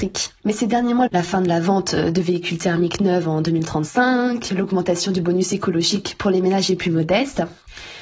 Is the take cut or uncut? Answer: cut